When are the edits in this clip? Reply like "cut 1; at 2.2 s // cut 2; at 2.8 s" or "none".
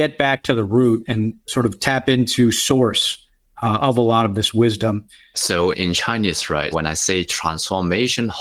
cut 1; at 5.3 s // cut 2; at 6.7 s